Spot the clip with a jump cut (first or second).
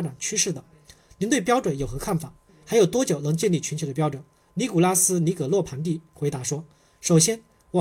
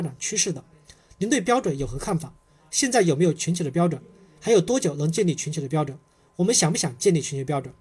first